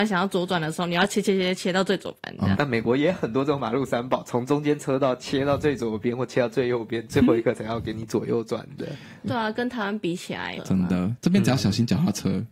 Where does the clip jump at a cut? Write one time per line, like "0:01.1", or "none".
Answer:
0:02.5
0:09.3
0:10.6